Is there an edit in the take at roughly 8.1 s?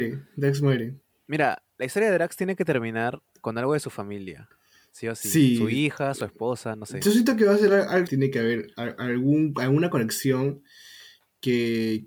yes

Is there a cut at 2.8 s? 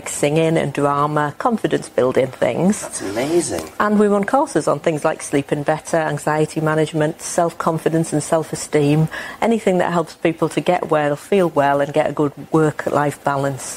no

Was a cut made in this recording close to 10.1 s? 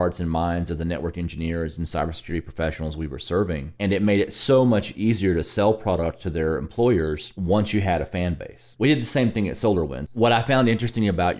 yes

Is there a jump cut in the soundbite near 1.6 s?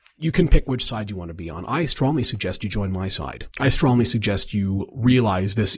no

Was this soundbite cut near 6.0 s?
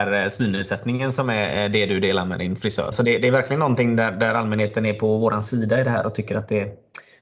no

